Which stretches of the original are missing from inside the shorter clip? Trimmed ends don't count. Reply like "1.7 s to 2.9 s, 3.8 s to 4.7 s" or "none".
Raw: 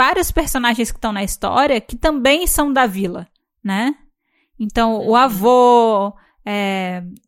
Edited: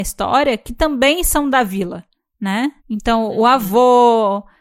4.0 s to 4.5 s

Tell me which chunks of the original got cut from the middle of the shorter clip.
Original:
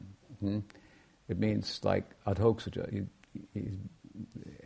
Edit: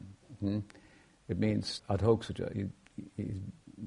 1.8 s to 2.2 s

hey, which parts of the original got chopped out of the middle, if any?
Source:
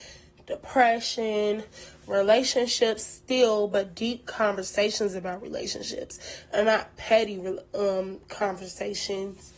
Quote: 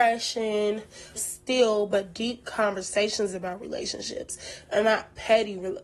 2.0 s to 3.0 s

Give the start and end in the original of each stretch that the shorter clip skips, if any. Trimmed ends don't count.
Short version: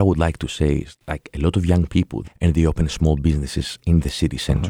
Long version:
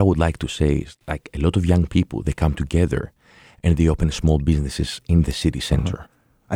2.2 s to 3.5 s

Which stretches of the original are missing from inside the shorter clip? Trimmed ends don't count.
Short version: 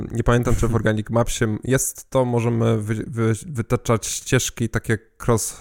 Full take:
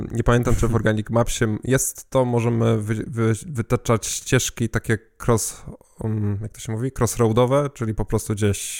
none

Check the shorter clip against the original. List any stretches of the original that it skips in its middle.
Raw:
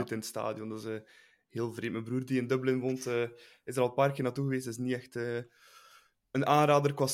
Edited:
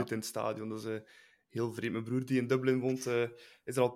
none

